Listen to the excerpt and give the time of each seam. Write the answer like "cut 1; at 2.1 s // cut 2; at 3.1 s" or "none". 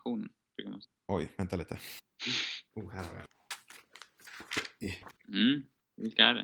none